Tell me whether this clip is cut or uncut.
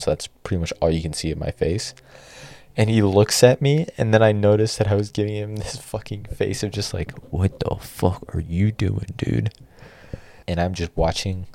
cut